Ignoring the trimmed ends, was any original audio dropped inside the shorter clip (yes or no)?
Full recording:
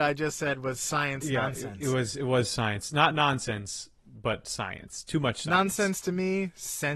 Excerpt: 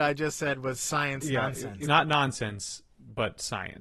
yes